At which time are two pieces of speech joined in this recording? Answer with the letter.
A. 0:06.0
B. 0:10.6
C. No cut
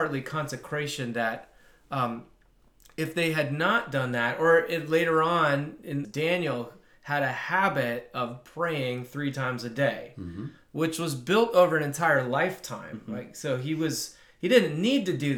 A